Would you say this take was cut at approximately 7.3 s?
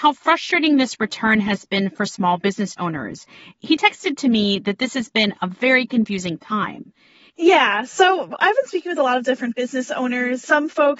yes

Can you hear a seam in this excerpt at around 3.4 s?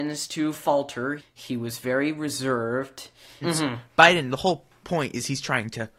yes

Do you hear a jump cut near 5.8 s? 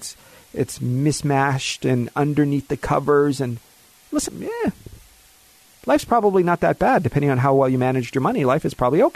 no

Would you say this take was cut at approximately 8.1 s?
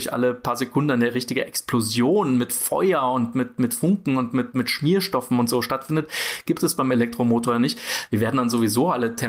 yes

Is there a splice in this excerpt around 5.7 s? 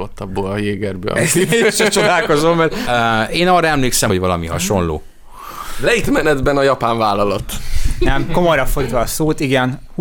no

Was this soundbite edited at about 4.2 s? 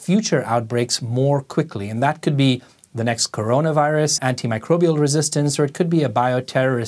yes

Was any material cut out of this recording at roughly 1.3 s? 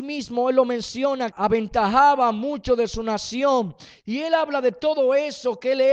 yes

